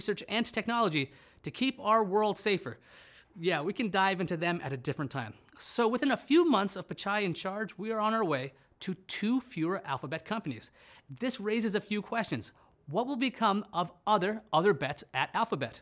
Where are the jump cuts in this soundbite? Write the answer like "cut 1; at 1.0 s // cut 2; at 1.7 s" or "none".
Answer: none